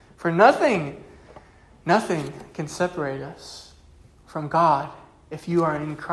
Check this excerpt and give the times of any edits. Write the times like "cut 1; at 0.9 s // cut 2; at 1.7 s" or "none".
none